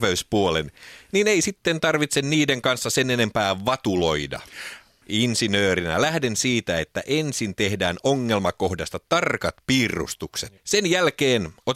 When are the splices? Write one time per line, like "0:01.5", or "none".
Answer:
0:05.0
0:10.6